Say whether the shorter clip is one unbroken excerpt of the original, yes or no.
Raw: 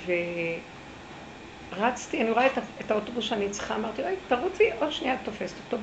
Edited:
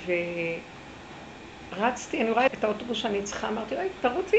no